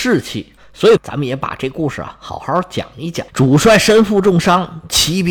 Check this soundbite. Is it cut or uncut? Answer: cut